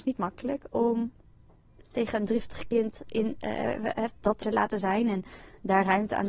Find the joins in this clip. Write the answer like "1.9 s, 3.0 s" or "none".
4.4 s